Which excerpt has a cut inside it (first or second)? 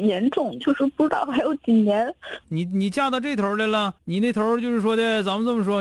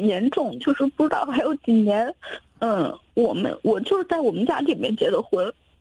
first